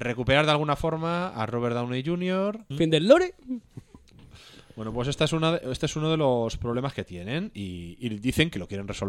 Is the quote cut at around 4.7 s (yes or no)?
no